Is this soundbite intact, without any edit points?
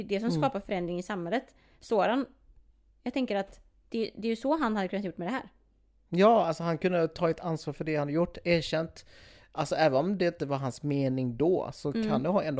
yes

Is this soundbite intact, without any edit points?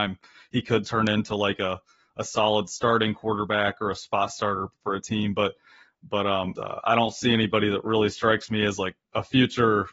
no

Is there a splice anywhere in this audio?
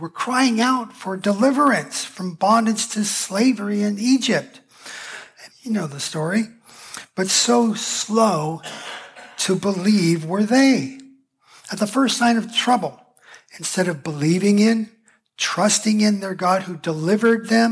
yes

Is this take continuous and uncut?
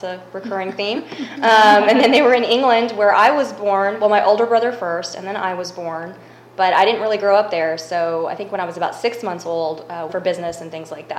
no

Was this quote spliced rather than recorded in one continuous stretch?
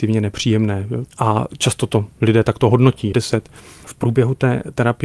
yes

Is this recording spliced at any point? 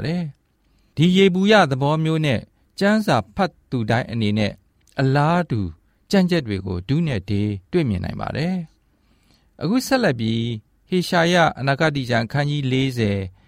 yes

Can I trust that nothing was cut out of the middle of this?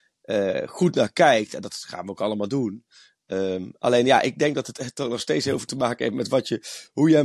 yes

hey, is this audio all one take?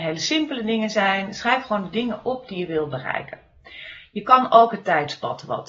yes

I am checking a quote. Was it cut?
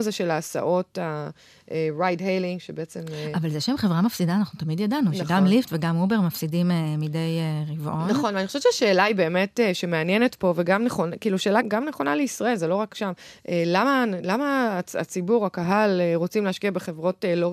yes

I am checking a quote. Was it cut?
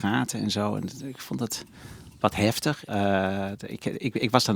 yes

